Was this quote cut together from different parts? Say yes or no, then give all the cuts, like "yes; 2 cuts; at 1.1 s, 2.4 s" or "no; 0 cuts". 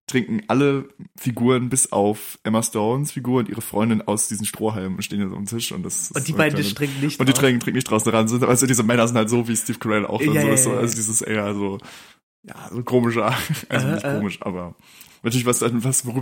no; 0 cuts